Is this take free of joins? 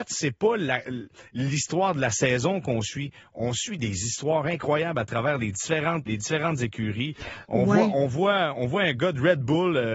no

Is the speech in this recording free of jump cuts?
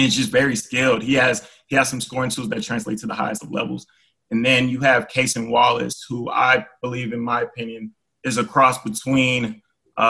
yes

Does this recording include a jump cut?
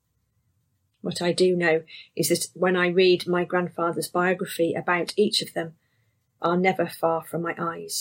yes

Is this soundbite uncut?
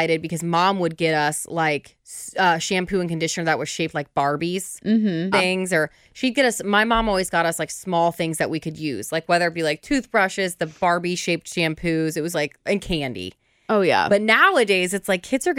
no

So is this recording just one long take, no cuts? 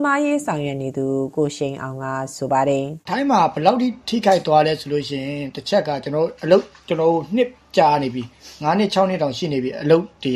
no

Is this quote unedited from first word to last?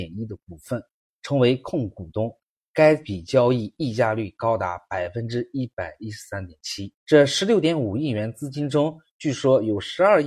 no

